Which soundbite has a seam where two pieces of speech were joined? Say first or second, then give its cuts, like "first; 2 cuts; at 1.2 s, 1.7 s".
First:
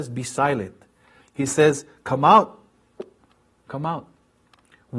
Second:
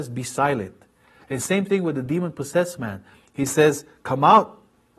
first; 1 cut; at 1.2 s